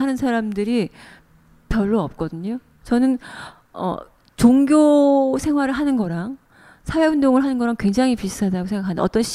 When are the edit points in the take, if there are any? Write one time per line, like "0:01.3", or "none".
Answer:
0:02.8